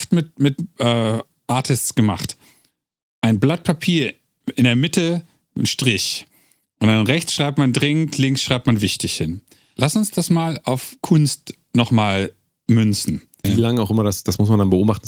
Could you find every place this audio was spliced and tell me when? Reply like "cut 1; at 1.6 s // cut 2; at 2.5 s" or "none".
cut 1; at 9.8 s // cut 2; at 13.4 s